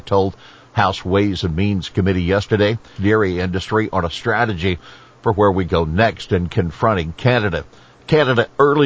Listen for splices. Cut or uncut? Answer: cut